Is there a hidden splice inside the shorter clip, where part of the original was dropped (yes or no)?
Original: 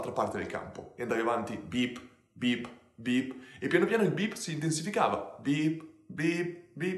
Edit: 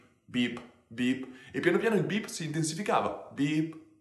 no